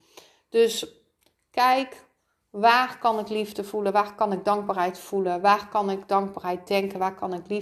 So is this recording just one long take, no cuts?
yes; 0 cuts

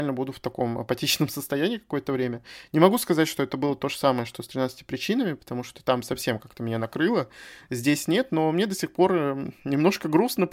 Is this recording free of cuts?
yes; 0 cuts

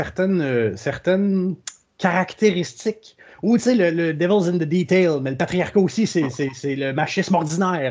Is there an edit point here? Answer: no; 0 cuts

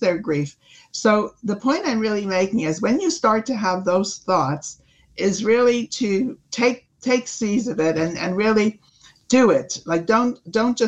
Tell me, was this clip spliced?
no; 0 cuts

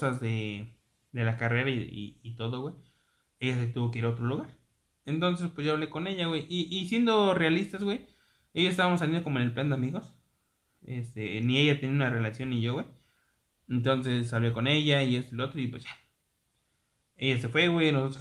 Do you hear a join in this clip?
no; 0 cuts

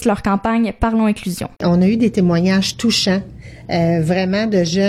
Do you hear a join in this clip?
yes; 1 cut; at 1.5 s

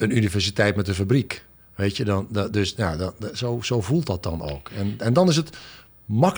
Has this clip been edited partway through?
no; 0 cuts

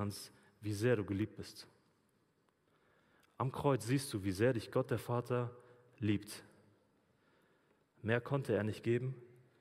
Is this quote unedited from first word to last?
yes; 0 cuts

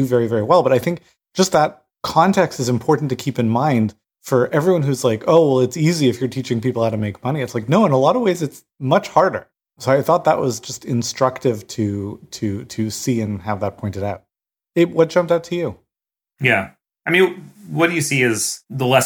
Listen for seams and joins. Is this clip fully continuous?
yes; 0 cuts

